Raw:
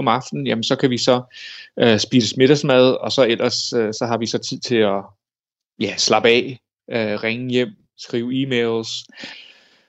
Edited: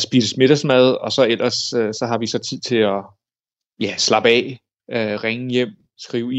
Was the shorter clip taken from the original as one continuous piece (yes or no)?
yes